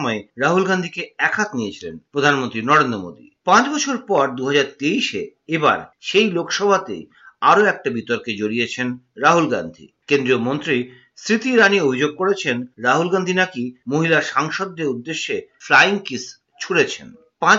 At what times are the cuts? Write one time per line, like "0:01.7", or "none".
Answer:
none